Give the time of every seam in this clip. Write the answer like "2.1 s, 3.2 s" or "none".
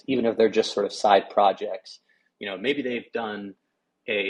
none